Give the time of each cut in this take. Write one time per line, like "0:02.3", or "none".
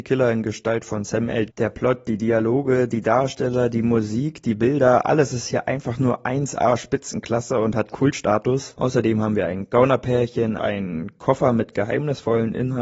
0:01.5
0:08.8
0:10.6